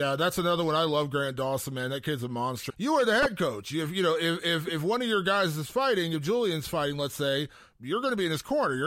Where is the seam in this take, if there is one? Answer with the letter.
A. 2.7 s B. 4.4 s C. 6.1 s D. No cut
A